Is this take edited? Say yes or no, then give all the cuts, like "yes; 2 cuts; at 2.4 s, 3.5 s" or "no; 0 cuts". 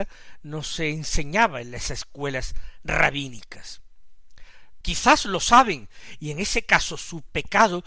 yes; 1 cut; at 4.8 s